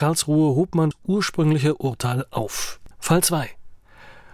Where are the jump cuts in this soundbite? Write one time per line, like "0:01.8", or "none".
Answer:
0:00.9
0:02.9